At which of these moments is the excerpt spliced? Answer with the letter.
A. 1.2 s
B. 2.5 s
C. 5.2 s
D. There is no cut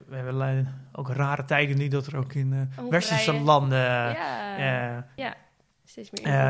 C